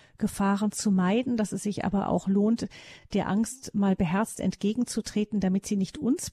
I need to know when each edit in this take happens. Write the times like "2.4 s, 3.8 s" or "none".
none

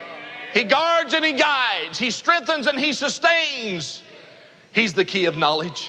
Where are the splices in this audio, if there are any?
none

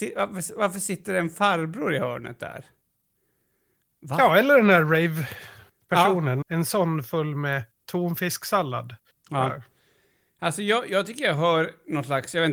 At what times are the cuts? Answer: 6.4 s, 9.2 s

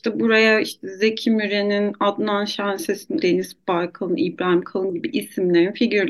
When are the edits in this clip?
3.2 s

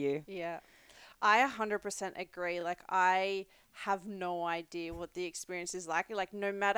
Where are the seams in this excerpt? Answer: none

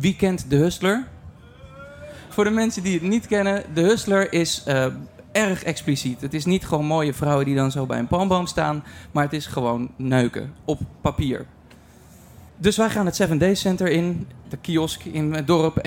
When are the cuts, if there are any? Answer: 12.5 s, 14.4 s

